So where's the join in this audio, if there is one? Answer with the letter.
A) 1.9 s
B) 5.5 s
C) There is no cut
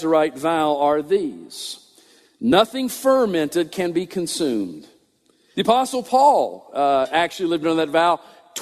B